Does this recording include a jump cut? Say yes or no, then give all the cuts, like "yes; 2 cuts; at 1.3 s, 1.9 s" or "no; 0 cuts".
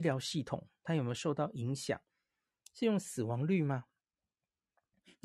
yes; 1 cut; at 2.6 s